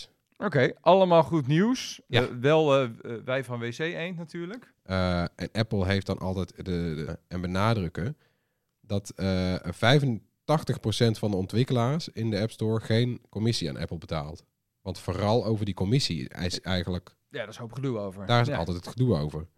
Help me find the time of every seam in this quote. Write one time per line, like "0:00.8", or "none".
0:04.7
0:07.1